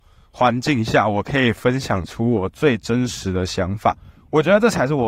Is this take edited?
no; 0 cuts

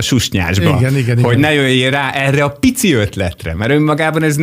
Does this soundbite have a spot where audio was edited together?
no; 0 cuts

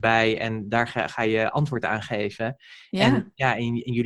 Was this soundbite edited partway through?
no; 0 cuts

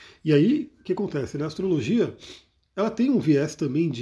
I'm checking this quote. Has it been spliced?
no; 0 cuts

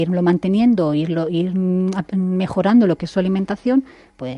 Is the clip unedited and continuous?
yes; 0 cuts

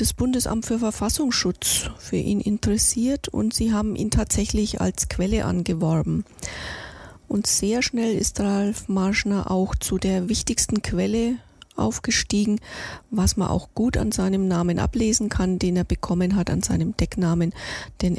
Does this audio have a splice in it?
no; 0 cuts

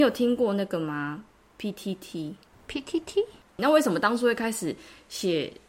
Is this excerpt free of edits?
no; 1 cut; at 3.6 s

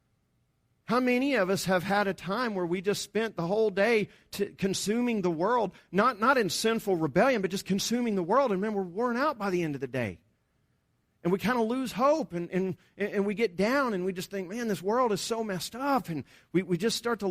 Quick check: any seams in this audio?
no; 0 cuts

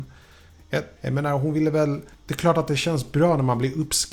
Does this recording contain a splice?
yes; 2 cuts; at 1.0 s, 2.1 s

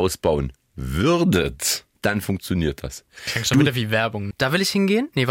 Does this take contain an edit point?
yes; 2 cuts; at 1.9 s, 4.3 s

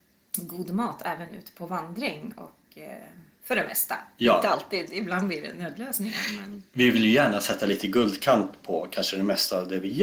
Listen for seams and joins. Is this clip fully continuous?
yes; 0 cuts

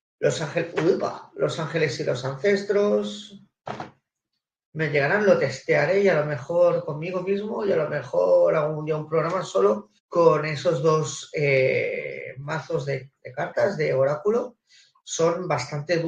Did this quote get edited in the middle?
yes; 2 cuts; at 4.7 s, 10.0 s

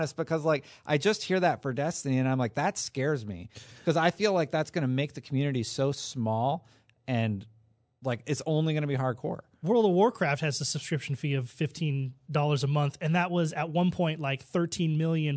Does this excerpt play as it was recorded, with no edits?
yes; 0 cuts

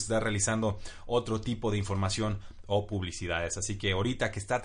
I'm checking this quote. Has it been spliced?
no; 0 cuts

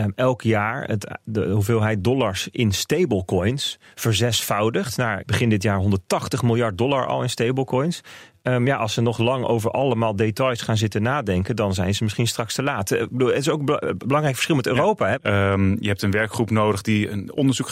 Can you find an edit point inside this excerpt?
yes; 2 cuts; at 5.2 s, 15.1 s

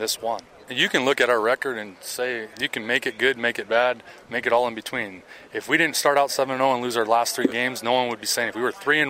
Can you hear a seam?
yes; 1 cut; at 2.5 s

